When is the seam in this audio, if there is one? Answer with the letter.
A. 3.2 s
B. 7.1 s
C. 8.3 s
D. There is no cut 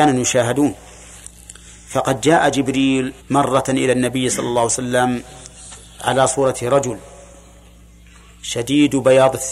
A